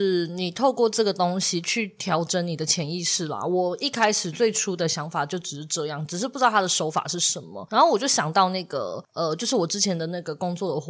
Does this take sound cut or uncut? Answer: uncut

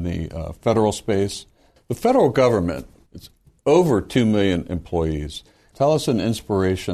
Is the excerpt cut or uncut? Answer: cut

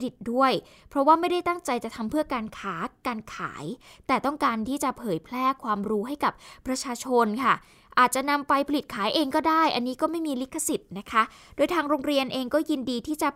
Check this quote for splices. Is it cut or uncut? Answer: uncut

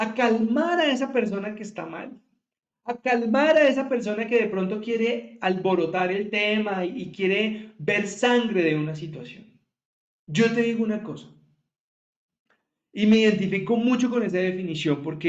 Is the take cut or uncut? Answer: uncut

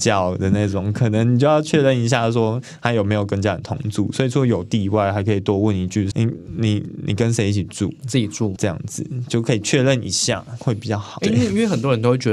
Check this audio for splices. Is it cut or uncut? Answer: cut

